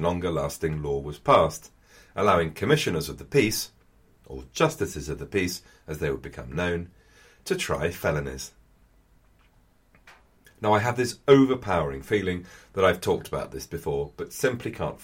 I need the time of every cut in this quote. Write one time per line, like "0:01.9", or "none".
none